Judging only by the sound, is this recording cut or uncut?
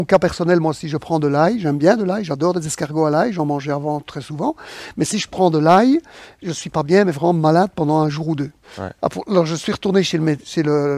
cut